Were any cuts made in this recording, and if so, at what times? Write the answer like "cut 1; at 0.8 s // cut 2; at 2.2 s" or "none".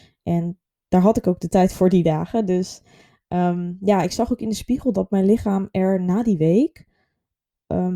none